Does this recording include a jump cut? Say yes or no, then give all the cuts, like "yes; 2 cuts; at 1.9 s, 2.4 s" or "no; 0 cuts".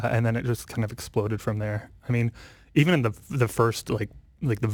no; 0 cuts